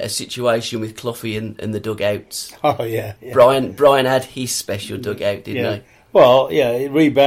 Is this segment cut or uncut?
cut